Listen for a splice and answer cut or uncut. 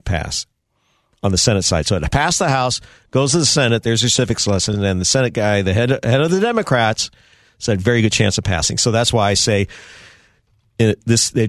uncut